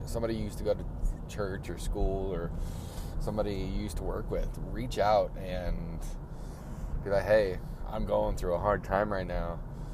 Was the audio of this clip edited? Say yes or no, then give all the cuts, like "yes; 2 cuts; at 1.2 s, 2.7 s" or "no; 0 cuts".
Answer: no; 0 cuts